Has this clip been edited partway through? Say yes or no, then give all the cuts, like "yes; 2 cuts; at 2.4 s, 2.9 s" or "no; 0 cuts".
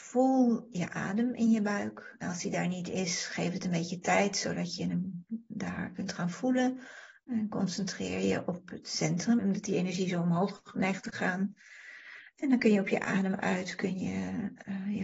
yes; 2 cuts; at 7.2 s, 9.4 s